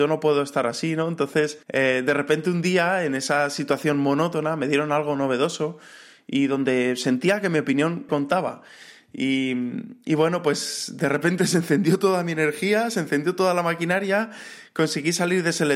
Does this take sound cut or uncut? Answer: cut